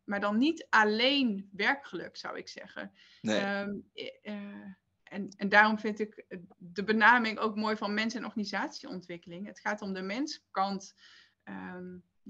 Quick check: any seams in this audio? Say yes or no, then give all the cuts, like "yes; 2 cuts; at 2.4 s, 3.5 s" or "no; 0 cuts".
no; 0 cuts